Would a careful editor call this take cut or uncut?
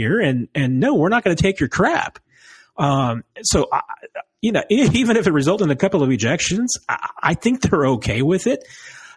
uncut